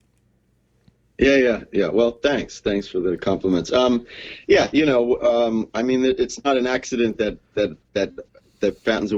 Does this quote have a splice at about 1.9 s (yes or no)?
no